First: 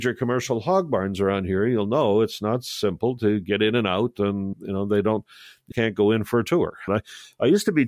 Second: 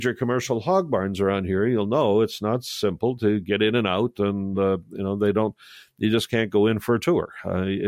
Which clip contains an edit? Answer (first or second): first